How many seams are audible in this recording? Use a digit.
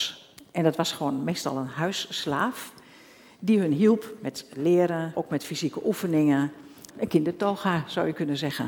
2